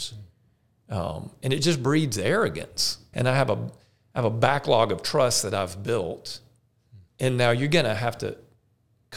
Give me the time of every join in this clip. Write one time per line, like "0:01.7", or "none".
0:03.1
0:07.1